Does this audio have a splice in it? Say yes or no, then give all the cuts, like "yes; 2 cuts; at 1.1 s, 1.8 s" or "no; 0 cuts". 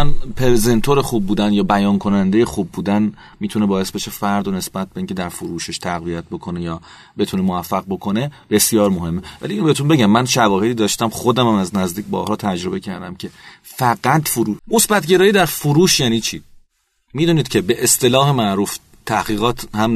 yes; 1 cut; at 14.6 s